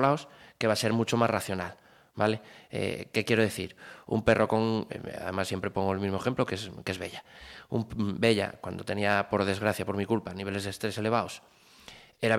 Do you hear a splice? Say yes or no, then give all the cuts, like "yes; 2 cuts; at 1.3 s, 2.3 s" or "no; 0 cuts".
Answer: no; 0 cuts